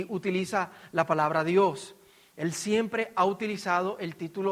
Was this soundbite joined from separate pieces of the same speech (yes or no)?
no